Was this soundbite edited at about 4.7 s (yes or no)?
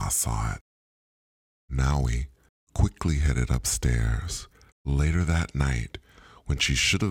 yes